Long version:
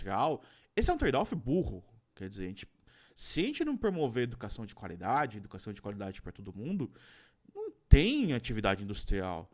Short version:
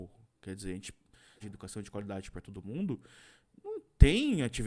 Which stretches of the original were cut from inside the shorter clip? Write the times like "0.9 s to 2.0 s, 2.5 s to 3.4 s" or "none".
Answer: 3.1 s to 5.3 s